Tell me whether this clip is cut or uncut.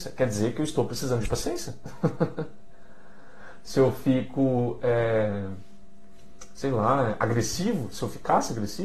uncut